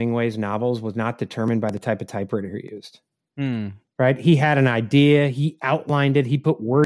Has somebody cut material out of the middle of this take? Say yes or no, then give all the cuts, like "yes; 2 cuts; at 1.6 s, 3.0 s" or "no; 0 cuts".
no; 0 cuts